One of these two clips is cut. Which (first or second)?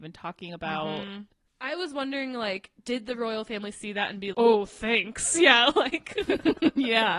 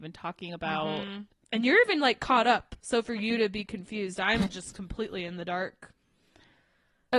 first